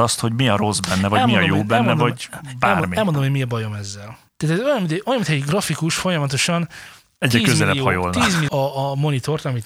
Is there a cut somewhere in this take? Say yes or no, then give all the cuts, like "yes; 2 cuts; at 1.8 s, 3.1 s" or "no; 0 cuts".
yes; 2 cuts; at 4.3 s, 8.5 s